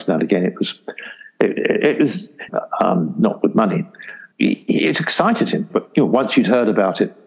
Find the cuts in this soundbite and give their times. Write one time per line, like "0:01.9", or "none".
0:02.5
0:04.3
0:05.7